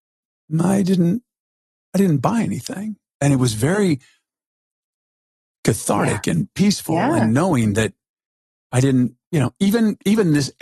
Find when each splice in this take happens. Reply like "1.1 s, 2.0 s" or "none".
none